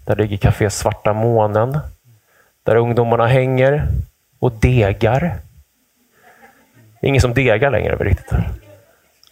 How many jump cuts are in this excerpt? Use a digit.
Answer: 0